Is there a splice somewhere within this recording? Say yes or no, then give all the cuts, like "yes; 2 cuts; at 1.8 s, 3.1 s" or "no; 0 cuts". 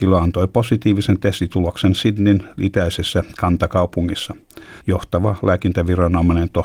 yes; 1 cut; at 4.8 s